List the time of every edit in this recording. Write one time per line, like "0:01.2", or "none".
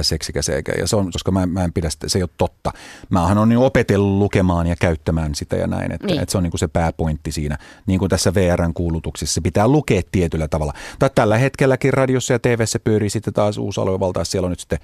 0:01.1